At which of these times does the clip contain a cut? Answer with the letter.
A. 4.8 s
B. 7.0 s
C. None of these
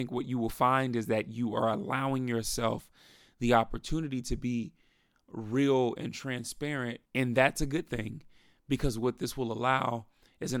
B